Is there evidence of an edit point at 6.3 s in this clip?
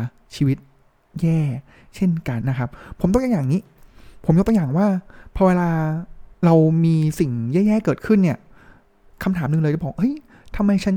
yes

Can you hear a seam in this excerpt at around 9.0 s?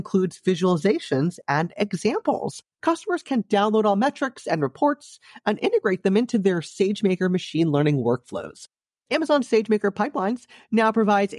no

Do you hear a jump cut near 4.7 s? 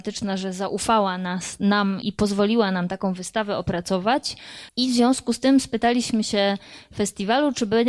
yes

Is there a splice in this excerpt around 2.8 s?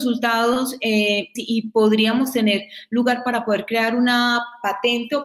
no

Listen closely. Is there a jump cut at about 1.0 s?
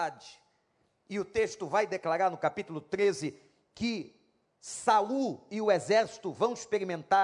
no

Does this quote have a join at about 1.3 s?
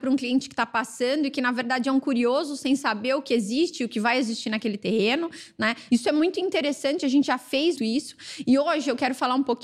no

